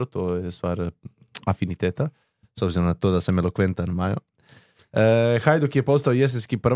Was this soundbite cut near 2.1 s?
no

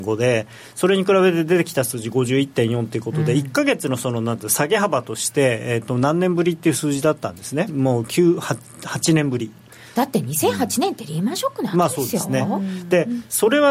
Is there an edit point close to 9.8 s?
no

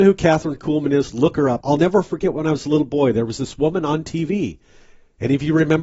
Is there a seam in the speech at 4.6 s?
no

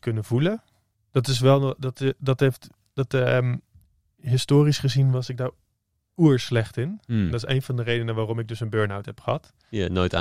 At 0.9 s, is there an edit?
yes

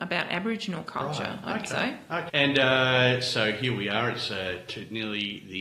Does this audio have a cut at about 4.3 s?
no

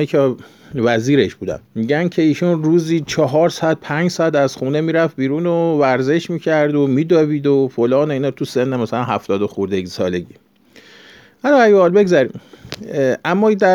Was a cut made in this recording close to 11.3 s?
no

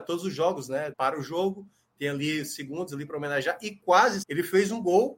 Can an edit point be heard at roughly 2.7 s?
no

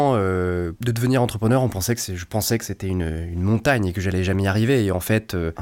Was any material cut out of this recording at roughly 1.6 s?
no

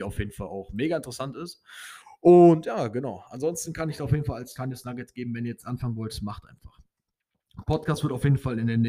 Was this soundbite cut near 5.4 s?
no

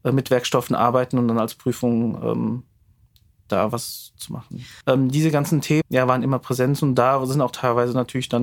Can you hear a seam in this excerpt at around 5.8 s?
yes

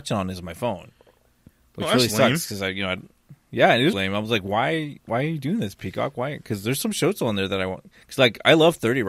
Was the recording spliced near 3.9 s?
yes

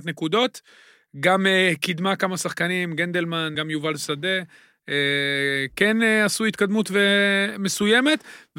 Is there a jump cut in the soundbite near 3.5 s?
yes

